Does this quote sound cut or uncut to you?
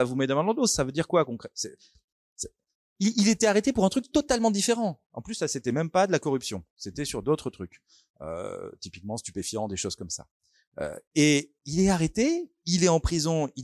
uncut